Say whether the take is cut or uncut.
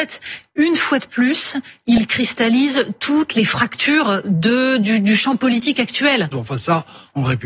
cut